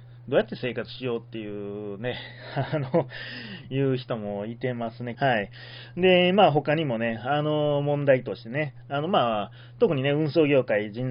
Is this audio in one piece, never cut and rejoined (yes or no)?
no